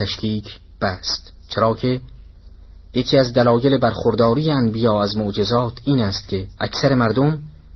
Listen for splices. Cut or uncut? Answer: cut